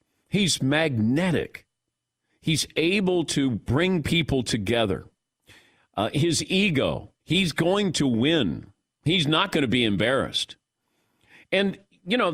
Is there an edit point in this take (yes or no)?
yes